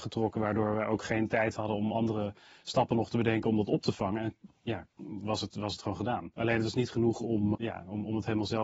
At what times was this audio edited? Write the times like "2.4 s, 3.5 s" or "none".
6.3 s, 7.5 s